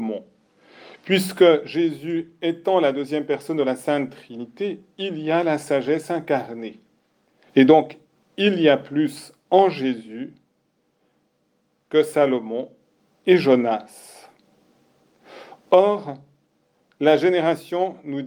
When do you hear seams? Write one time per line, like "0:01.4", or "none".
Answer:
0:07.5